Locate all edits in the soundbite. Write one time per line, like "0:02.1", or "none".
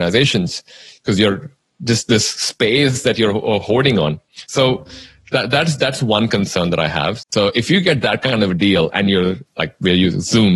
0:07.2
0:09.5